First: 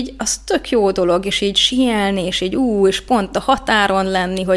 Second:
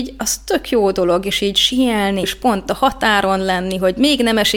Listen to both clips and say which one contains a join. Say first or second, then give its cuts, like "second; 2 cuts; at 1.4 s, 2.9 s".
second; 1 cut; at 2.2 s